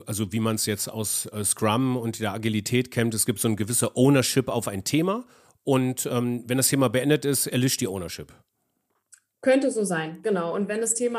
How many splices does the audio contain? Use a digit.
0